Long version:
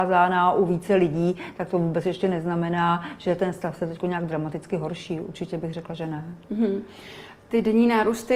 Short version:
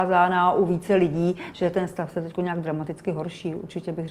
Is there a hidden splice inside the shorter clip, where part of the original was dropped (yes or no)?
yes